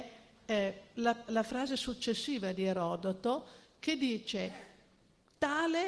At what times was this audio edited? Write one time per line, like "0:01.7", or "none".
0:01.3